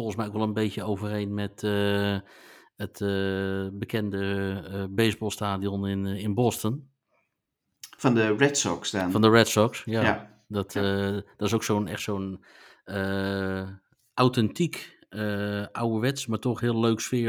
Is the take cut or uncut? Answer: uncut